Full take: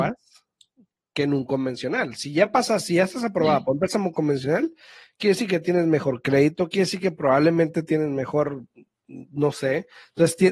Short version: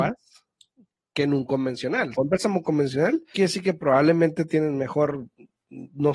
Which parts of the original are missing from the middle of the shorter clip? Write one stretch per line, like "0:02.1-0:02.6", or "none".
0:02.1-0:03.6
0:04.8-0:06.7